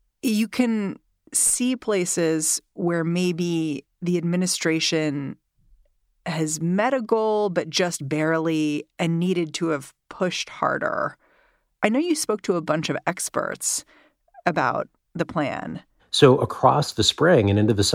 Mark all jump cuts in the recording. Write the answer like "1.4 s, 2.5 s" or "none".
16.0 s